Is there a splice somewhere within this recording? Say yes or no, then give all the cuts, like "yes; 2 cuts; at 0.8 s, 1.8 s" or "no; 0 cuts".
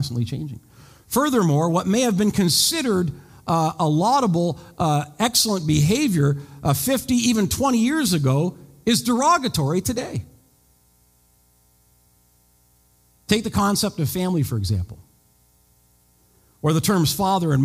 no; 0 cuts